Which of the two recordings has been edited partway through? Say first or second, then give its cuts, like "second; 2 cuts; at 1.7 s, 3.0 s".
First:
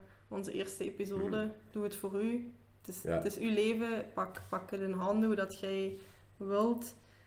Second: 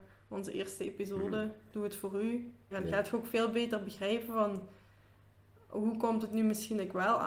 second; 1 cut; at 2.7 s